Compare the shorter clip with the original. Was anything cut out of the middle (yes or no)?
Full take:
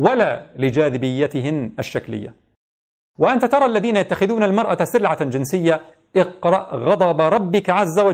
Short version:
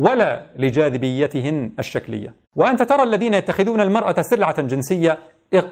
yes